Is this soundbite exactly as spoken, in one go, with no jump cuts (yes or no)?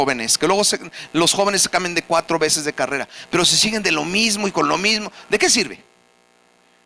yes